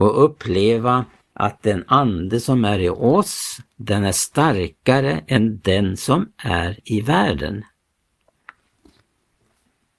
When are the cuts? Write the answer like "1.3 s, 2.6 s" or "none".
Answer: 1.2 s, 3.7 s